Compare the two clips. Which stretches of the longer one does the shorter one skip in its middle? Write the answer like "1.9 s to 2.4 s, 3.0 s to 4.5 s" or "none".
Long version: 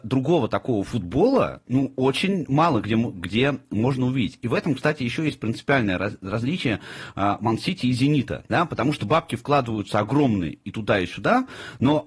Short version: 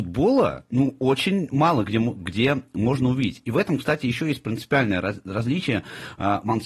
none